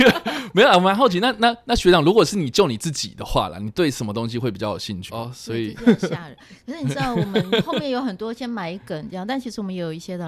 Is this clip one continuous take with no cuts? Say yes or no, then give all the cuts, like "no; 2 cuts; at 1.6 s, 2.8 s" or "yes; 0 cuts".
no; 1 cut; at 5.1 s